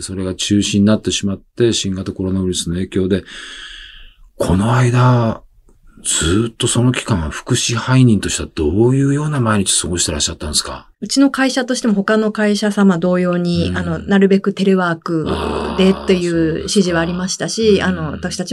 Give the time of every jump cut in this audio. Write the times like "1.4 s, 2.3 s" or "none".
10.9 s